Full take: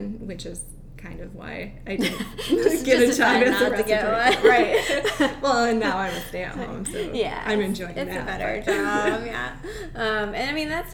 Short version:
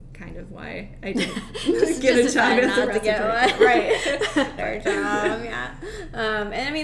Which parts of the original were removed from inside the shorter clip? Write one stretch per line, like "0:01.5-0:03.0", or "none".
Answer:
0:05.4-0:08.4